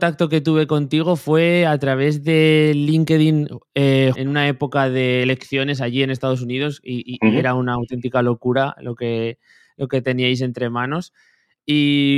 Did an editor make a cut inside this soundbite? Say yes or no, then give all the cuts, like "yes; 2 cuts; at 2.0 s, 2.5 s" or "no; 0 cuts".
yes; 1 cut; at 4.1 s